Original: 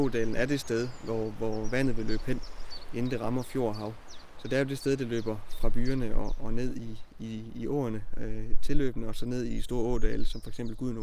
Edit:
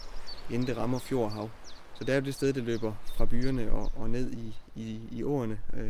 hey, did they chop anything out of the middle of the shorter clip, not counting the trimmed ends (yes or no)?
no